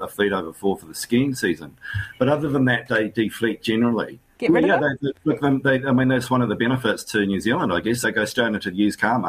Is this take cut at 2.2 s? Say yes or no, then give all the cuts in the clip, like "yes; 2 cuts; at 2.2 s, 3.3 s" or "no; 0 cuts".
no; 2 cuts; at 4.3 s, 8.0 s